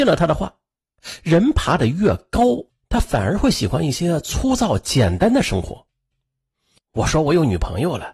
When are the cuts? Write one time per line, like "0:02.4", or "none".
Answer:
0:06.8